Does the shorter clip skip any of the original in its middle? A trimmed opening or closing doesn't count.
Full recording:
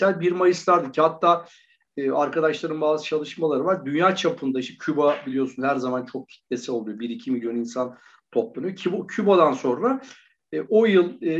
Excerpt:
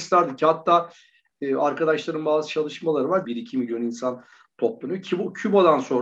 yes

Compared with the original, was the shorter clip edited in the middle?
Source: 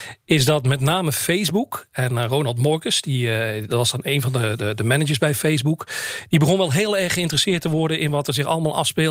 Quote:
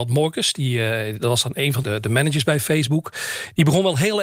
yes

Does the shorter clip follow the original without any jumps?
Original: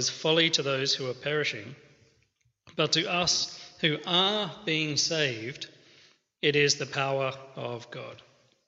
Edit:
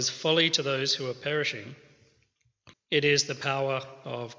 no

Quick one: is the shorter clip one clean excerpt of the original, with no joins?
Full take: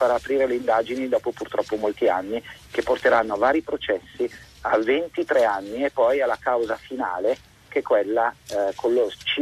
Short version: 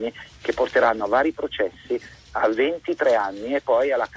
yes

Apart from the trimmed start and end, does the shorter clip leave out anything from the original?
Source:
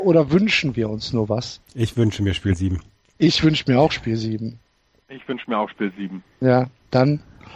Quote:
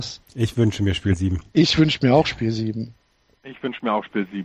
yes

